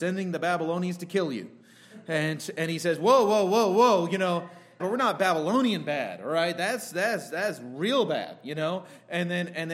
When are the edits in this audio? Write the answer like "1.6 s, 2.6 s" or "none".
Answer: 4.8 s